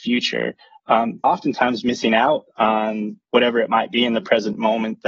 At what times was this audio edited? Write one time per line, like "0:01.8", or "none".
0:01.2